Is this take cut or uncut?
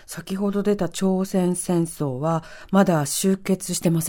uncut